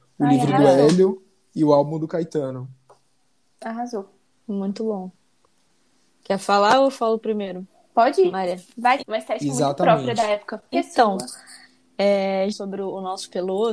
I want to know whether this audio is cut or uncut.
cut